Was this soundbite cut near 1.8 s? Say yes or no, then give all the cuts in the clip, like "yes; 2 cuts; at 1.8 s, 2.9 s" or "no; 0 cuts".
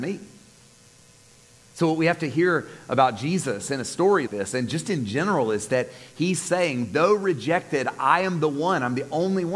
no; 1 cut; at 4.3 s